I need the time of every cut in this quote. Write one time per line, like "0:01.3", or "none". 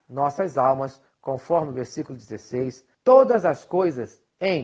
0:02.9